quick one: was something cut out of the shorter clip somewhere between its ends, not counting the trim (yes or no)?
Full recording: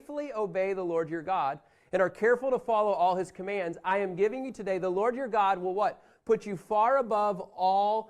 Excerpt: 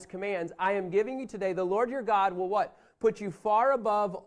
no